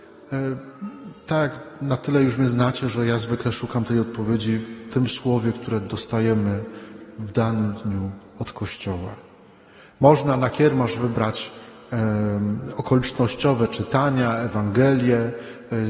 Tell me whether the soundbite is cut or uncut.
uncut